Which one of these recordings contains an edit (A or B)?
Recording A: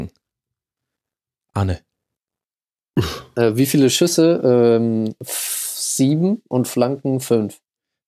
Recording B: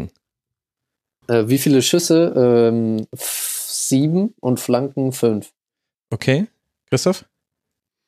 B